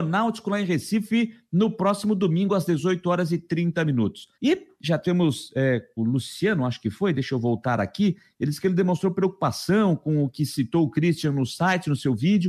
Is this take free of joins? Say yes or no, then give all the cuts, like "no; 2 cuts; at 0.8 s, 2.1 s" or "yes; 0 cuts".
no; 2 cuts; at 4.3 s, 6.0 s